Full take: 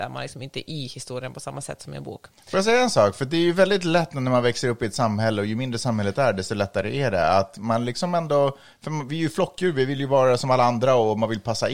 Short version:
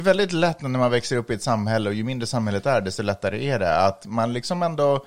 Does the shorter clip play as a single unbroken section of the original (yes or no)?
yes